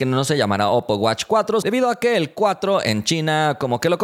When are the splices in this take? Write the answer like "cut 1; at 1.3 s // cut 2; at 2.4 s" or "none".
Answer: cut 1; at 1.6 s